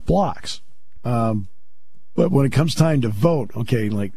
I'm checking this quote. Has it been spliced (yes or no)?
yes